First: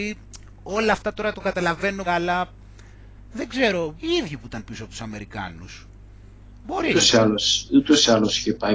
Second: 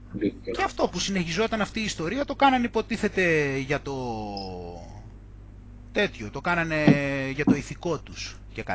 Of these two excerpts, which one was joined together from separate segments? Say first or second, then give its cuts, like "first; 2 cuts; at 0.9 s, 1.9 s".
first; 2 cuts; at 2.1 s, 4.0 s